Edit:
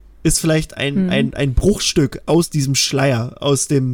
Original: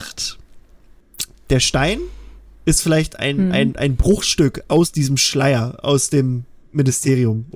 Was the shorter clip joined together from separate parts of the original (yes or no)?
no